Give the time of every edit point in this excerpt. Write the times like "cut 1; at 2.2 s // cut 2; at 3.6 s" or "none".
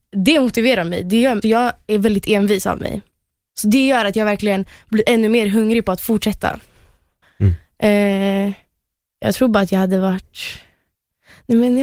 cut 1; at 1.4 s // cut 2; at 7.2 s